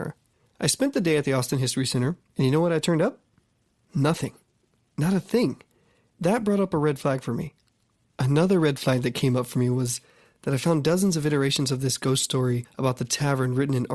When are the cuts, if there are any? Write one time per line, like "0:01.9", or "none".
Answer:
0:02.3